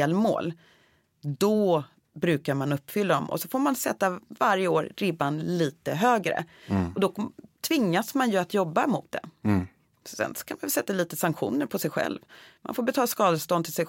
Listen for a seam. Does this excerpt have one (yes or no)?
no